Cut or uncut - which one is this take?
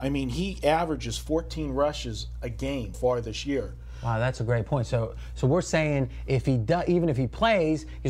cut